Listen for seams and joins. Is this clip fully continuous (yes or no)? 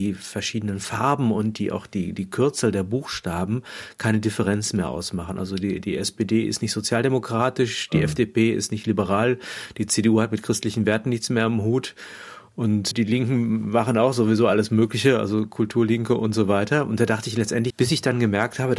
no